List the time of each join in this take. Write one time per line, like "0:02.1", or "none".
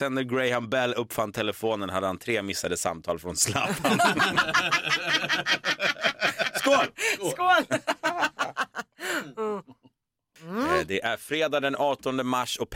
none